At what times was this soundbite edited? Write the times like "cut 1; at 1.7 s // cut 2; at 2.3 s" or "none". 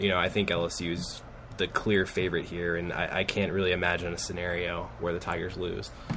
none